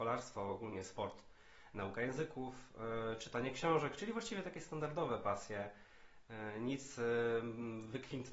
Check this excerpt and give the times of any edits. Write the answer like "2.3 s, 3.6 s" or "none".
none